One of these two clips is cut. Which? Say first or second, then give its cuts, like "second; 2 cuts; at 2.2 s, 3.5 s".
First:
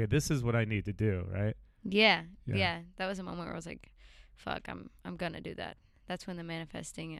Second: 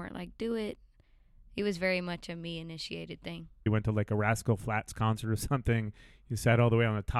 second; 1 cut; at 3.7 s